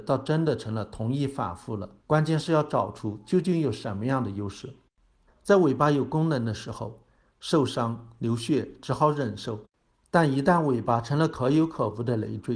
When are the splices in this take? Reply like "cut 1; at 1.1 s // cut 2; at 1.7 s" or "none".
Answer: cut 1; at 2.0 s // cut 2; at 5.3 s

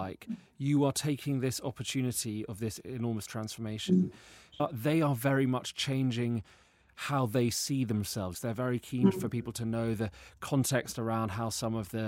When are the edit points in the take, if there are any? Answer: cut 1; at 4.6 s // cut 2; at 8.3 s

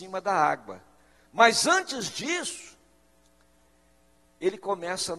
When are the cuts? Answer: cut 1; at 1.2 s

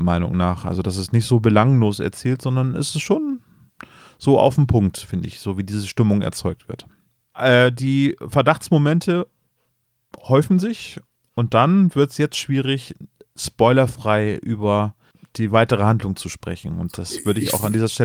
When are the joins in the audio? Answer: none

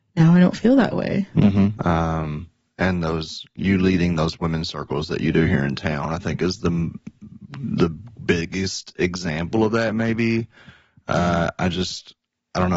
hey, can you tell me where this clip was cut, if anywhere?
cut 1; at 1.7 s

